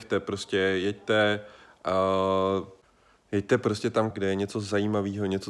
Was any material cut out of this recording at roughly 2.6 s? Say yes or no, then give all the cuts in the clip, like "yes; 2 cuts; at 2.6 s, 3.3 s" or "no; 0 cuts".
no; 1 cut; at 4.1 s